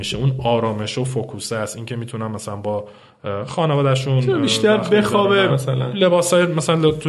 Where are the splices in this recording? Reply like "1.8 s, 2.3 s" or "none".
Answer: 5.5 s